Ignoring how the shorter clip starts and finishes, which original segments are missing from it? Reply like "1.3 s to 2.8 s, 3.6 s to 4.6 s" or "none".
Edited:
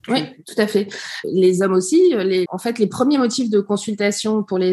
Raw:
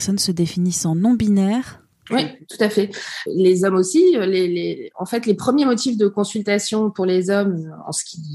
4.5 s to 4.9 s